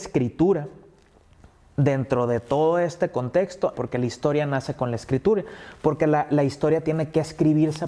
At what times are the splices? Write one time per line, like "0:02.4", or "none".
0:03.7